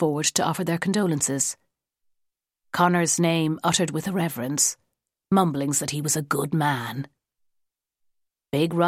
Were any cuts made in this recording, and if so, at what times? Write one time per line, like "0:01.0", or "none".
none